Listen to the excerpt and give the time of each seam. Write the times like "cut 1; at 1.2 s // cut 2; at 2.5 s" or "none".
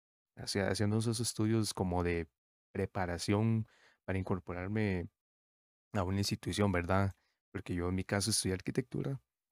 none

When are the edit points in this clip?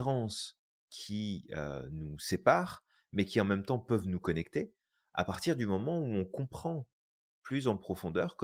none

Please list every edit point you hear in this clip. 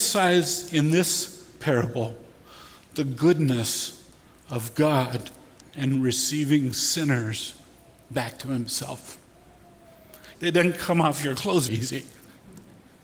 cut 1; at 10.3 s // cut 2; at 11.7 s

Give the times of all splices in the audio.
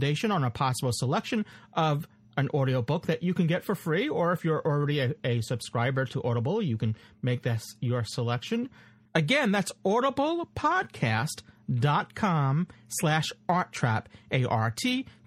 cut 1; at 9.1 s

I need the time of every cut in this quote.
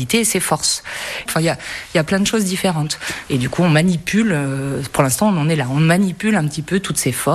cut 1; at 1.3 s // cut 2; at 3.3 s

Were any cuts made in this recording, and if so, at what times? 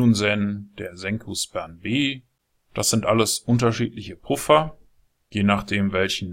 none

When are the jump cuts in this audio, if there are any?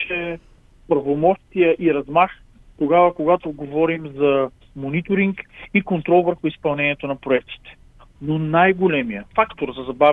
cut 1; at 8.2 s

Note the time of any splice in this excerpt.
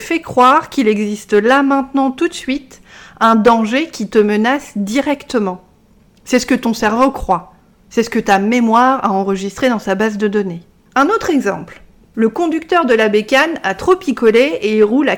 cut 1; at 12.0 s

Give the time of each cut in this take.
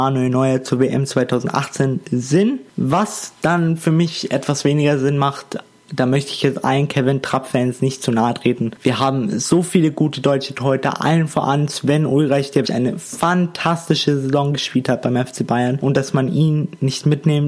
cut 1; at 8.8 s // cut 2; at 12.6 s

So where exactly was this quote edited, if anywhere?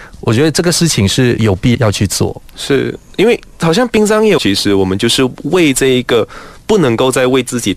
cut 1; at 1.7 s // cut 2; at 4.4 s

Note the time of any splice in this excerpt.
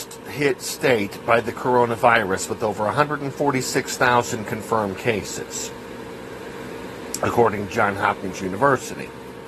none

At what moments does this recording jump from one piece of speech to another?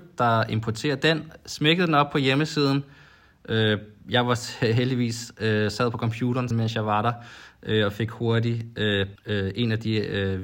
cut 1; at 6.5 s // cut 2; at 9.2 s

